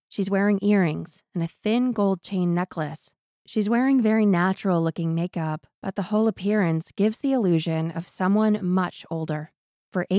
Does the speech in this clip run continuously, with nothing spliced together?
yes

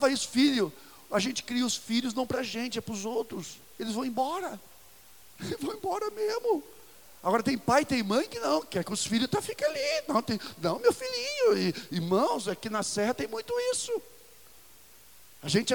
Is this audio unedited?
yes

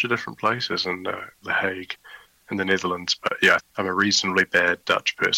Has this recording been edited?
yes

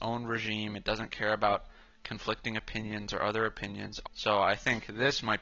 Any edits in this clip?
yes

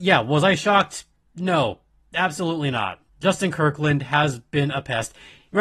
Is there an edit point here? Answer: yes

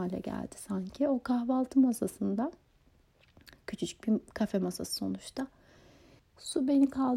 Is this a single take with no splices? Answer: no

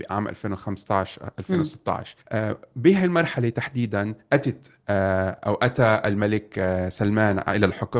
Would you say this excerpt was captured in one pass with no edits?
no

